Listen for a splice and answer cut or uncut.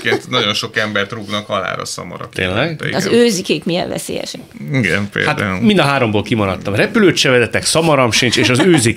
uncut